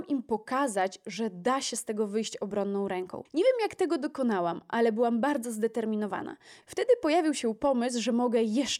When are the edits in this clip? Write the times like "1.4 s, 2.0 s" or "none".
3.3 s, 6.6 s

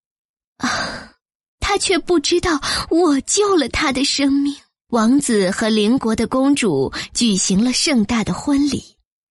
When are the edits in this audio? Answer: 4.8 s

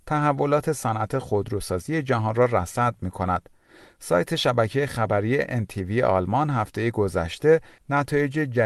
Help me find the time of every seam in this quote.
none

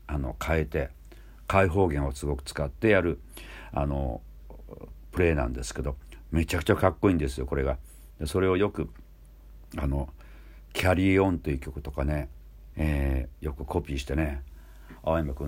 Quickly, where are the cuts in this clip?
12.7 s

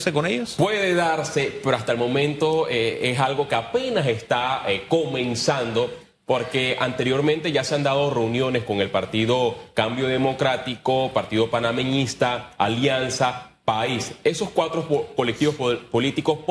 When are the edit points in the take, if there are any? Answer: none

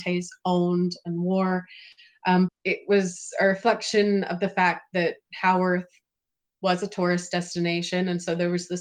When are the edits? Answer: 2.5 s

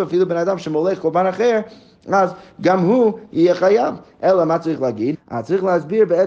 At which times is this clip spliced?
5.1 s

